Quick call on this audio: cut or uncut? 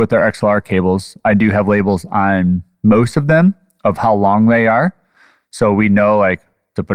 uncut